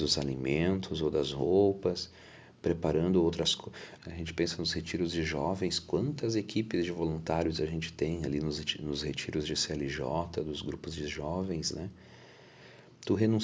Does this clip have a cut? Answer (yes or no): yes